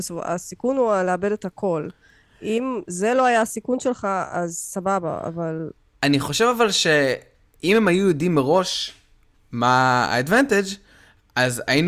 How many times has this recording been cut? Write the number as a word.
zero